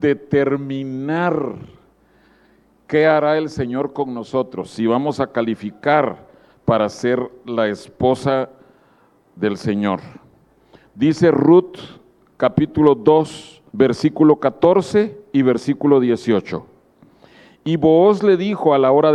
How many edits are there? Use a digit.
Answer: 1